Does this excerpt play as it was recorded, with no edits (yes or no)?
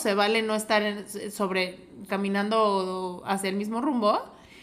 no